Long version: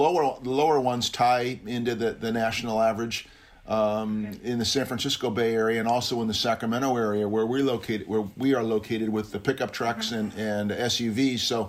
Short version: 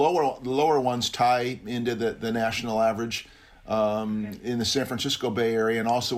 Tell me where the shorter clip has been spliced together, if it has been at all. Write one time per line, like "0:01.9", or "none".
none